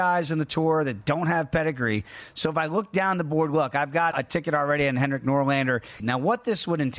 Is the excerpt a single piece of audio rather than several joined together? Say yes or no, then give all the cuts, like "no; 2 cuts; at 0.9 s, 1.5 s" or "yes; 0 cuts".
no; 2 cuts; at 4.1 s, 6.0 s